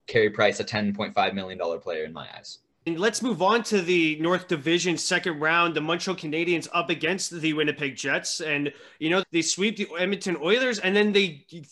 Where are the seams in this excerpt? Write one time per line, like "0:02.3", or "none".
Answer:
0:02.9
0:09.2